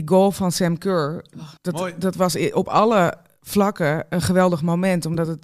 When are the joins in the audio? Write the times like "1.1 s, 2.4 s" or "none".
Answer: 1.6 s